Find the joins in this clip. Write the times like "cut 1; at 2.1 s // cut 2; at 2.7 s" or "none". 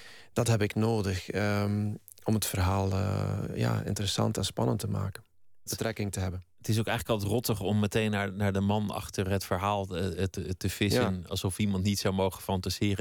cut 1; at 5.7 s